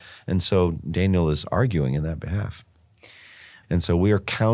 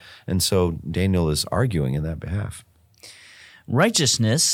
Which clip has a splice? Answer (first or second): first